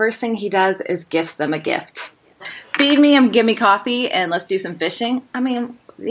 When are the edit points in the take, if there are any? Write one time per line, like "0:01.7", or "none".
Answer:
0:02.4